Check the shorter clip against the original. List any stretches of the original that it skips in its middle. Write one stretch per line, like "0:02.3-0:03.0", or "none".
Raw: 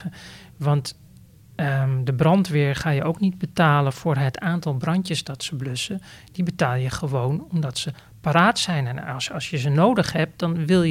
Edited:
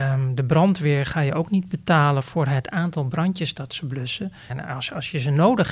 0:06.2-0:08.9